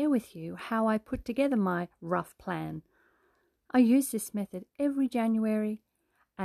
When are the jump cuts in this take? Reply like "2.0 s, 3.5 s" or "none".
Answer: none